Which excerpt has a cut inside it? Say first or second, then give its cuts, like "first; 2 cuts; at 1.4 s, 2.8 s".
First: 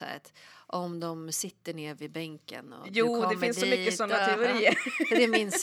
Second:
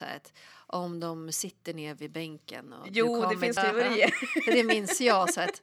second; 1 cut; at 3.6 s